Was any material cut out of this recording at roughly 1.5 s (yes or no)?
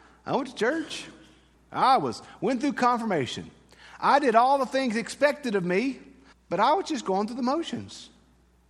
yes